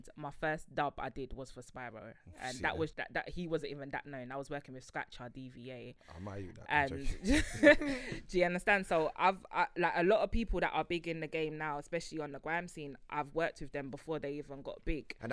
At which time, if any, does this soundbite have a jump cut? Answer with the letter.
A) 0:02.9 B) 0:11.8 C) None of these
A